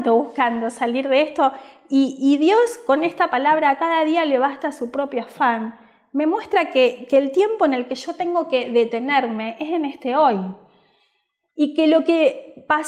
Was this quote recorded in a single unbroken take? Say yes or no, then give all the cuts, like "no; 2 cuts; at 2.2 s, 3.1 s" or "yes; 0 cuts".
yes; 0 cuts